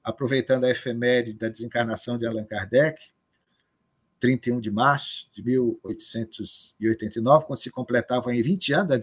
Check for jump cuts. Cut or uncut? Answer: uncut